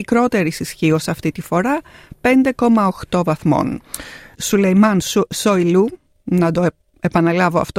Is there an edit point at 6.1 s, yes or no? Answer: no